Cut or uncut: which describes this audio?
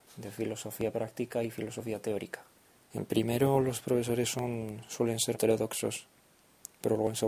cut